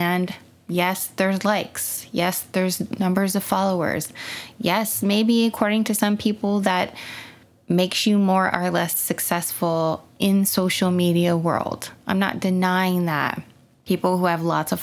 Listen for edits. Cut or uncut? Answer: uncut